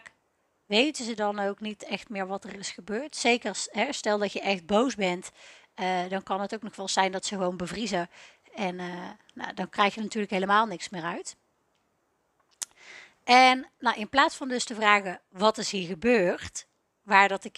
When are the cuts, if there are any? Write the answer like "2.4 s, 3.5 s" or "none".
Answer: none